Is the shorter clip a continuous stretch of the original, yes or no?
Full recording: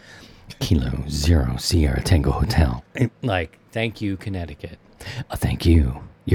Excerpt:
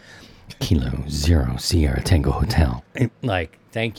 yes